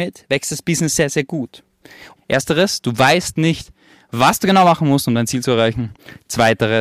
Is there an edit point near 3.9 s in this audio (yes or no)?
no